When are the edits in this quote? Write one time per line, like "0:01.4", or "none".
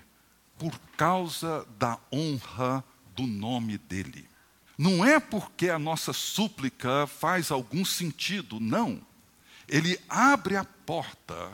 0:04.7

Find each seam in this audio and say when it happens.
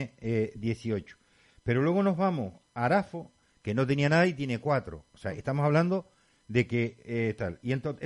none

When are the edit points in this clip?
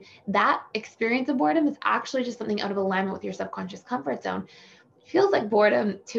none

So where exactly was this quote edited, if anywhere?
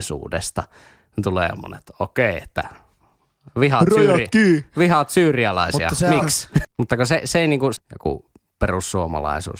0:06.6
0:07.8

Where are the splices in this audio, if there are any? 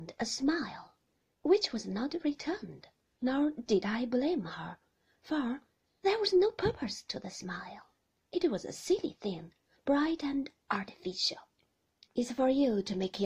0:12.1

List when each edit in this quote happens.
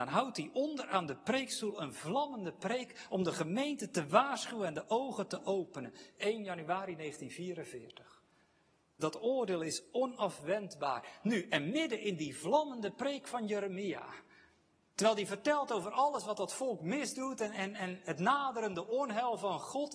0:09.0

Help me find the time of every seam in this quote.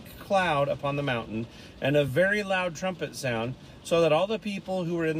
none

